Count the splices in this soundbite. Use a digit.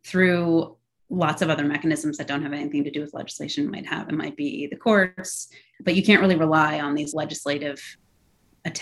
1